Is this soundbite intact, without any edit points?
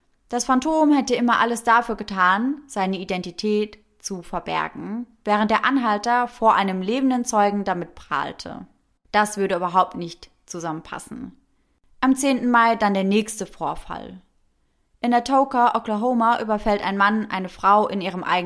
yes; 0 cuts

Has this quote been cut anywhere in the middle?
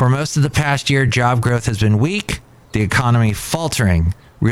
no; 0 cuts

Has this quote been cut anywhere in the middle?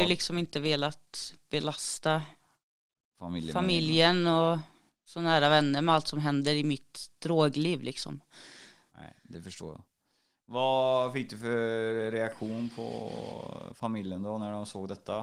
no; 0 cuts

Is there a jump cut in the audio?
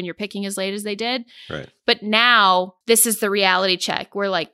yes; 1 cut; at 2.8 s

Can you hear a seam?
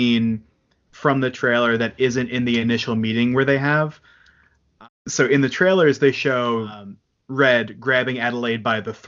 no; 0 cuts

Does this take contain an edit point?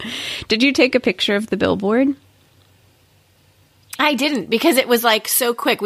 no; 0 cuts

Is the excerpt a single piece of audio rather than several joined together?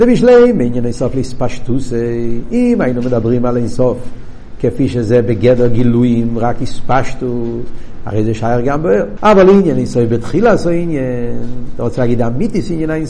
no; 1 cut; at 9.2 s

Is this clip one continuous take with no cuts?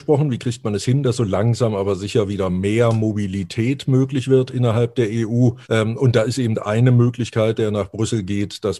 no; 2 cuts; at 5.6 s, 7.5 s

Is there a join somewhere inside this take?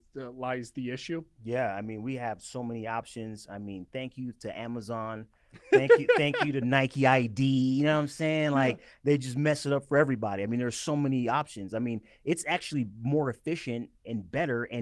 no; 0 cuts

